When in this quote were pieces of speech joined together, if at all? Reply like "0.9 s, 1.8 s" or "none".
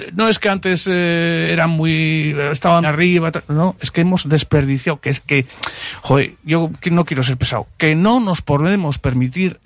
2.8 s